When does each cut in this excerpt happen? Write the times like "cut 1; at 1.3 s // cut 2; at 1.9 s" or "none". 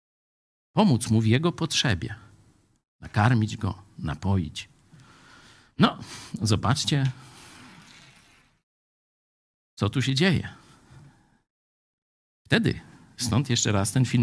none